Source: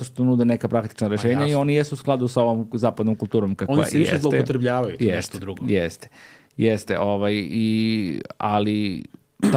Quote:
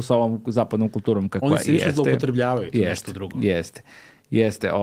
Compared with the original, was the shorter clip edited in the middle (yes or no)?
no